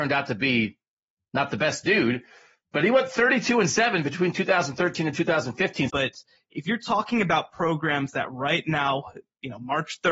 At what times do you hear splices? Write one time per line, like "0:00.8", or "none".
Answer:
0:05.9